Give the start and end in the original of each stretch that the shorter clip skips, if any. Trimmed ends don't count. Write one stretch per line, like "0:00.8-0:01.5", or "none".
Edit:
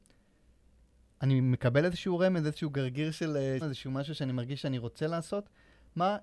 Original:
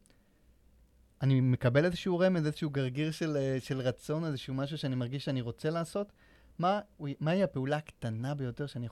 0:03.6-0:04.2